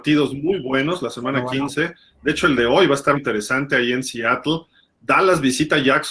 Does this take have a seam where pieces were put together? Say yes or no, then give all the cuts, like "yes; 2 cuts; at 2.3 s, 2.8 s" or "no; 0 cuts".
yes; 1 cut; at 3.2 s